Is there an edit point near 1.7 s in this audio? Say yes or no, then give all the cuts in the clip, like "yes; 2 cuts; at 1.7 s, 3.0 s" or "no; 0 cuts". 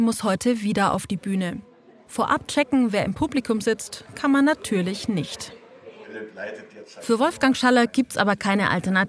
no; 0 cuts